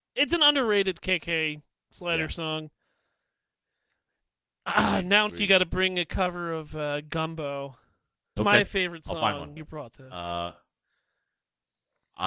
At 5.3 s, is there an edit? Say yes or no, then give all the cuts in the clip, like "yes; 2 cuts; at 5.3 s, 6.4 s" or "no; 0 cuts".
yes; 3 cuts; at 5.3 s, 8.4 s, 9.6 s